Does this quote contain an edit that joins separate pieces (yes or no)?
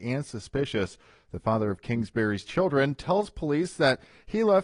no